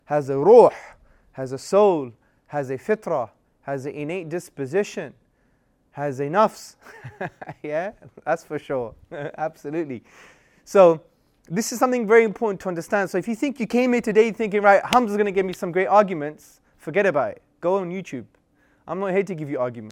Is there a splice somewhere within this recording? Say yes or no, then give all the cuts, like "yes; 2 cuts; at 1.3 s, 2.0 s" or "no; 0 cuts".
no; 0 cuts